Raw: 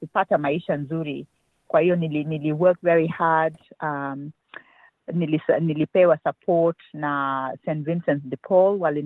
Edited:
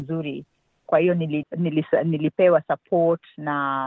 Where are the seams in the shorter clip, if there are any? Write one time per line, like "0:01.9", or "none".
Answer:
0:01.4